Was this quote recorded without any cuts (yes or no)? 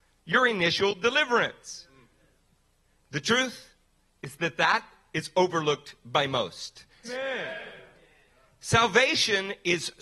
no